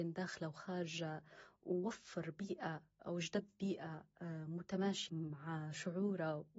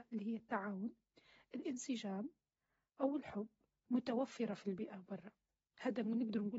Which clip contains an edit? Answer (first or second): first